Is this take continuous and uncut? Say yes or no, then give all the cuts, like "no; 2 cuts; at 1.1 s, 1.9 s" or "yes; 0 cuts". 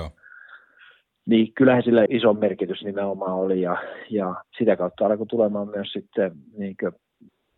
no; 2 cuts; at 2.1 s, 4.5 s